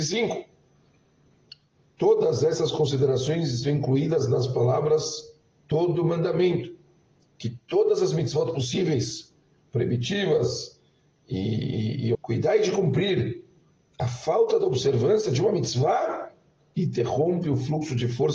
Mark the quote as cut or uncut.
cut